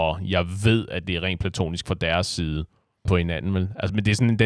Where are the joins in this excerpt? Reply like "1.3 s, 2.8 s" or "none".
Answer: 3.1 s